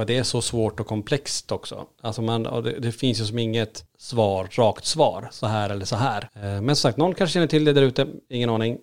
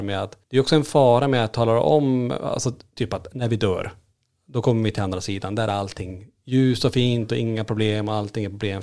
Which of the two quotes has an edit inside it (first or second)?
first